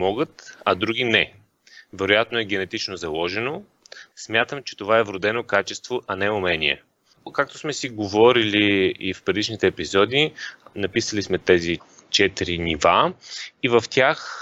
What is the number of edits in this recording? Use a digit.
1